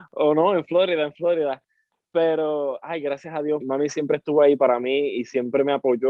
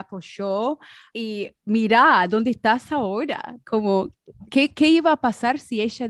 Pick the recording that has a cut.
first; 1 cut; at 3.6 s

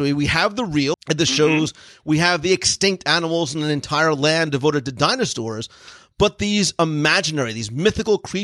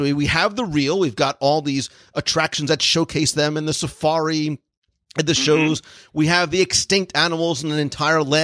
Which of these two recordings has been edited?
first; 1 cut; at 0.9 s

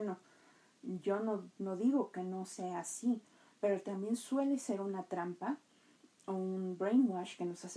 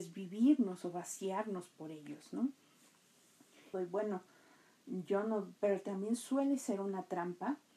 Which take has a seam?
second; 2 cuts; at 3.7 s, 5.6 s

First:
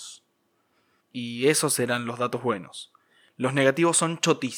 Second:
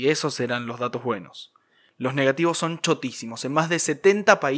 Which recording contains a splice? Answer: first; 1 cut; at 1.0 s

